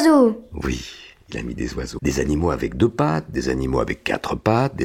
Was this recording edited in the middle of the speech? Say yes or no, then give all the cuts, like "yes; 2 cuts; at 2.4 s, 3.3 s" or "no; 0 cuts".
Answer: yes; 1 cut; at 2.0 s